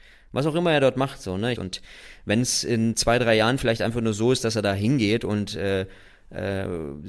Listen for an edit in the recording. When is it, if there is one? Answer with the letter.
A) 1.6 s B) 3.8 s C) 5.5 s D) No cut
A